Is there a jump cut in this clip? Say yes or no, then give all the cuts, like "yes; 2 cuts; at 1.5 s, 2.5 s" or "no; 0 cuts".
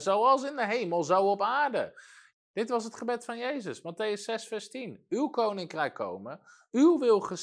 yes; 1 cut; at 2.3 s